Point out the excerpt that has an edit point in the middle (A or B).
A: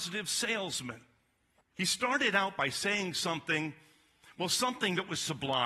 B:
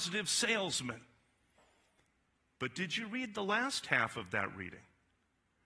A